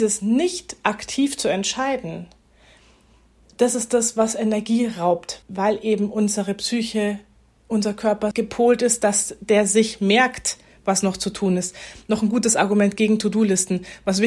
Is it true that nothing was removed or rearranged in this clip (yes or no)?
no